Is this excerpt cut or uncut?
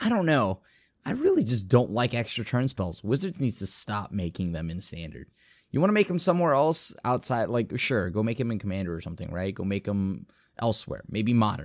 uncut